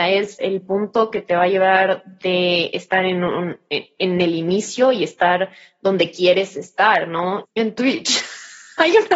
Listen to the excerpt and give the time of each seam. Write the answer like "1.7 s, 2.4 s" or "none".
7.4 s